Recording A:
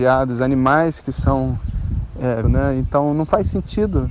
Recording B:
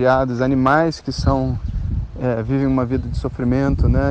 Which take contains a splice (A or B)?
A